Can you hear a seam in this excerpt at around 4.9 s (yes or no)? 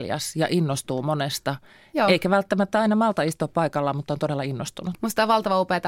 yes